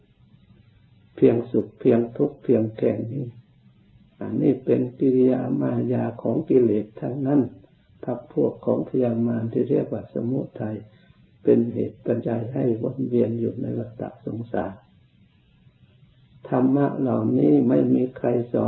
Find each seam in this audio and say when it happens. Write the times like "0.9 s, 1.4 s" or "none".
12.2 s